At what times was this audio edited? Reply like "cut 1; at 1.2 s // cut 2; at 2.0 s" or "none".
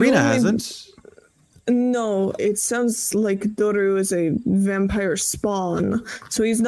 cut 1; at 2.4 s